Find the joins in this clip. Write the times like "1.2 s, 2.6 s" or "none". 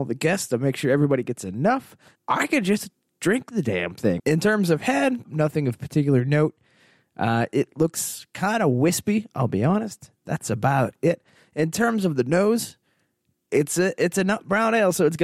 2.1 s, 4.2 s, 5.2 s